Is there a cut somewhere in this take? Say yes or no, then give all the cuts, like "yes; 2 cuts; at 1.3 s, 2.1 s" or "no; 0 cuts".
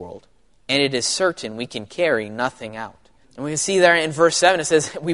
yes; 1 cut; at 3.2 s